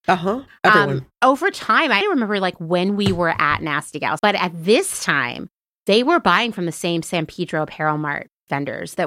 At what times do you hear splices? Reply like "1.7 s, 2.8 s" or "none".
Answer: 2.0 s, 4.2 s